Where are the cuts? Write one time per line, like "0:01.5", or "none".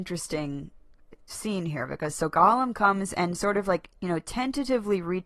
0:01.3